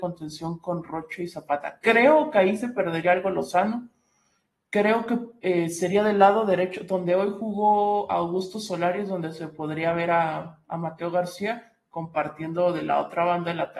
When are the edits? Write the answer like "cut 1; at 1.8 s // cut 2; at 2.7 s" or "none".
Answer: none